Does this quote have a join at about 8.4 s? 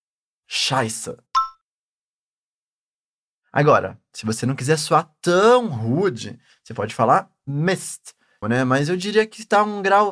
yes; 1 cut; at 8.4 s

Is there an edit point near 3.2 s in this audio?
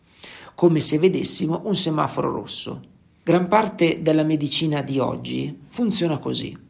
yes; 1 cut; at 3.2 s

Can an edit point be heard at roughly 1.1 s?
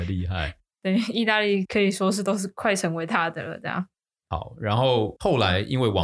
no; 1 cut; at 4.2 s

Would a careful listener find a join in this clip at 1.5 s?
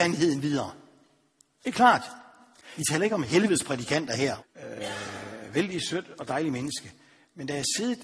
no; 2 cuts; at 2.8 s, 4.4 s

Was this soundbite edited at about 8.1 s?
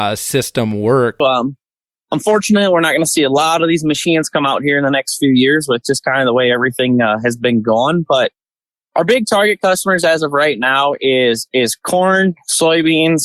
no; 1 cut; at 1.2 s

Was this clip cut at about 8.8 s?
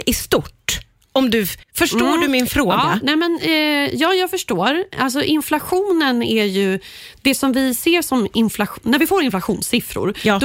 no; 1 cut; at 1.6 s

